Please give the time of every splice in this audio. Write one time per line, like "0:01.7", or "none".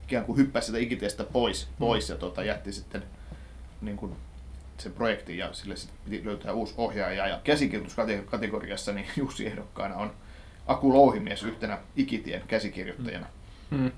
0:07.4